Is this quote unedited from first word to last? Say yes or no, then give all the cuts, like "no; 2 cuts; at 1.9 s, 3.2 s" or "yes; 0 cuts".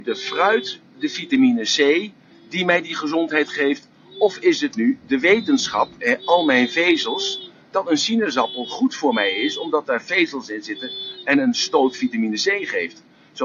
no; 1 cut; at 6.0 s